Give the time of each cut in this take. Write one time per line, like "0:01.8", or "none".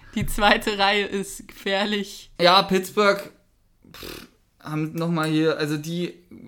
0:02.4